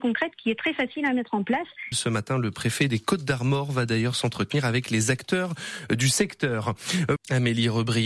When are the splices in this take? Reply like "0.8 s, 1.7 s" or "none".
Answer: 1.9 s, 7.2 s